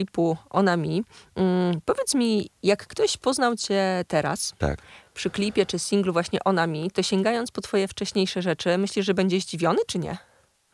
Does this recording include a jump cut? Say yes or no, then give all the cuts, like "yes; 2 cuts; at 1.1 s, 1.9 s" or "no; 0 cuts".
no; 0 cuts